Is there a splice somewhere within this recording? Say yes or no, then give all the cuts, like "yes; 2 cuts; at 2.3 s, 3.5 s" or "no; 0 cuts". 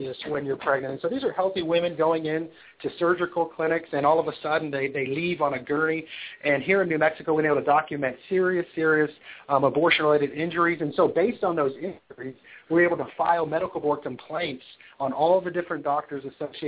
no; 0 cuts